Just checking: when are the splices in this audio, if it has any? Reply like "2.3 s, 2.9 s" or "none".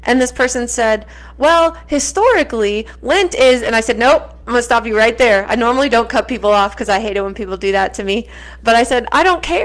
none